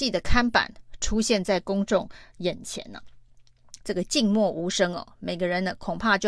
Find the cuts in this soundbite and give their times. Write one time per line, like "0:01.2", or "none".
0:03.8